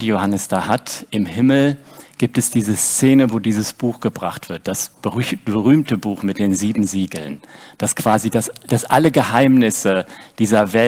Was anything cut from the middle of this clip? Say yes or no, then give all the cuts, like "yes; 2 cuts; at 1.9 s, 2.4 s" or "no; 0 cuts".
no; 0 cuts